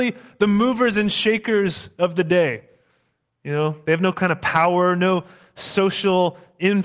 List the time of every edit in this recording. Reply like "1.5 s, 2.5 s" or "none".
none

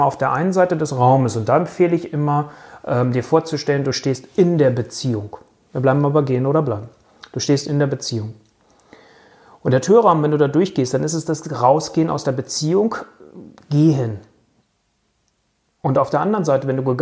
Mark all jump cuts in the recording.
none

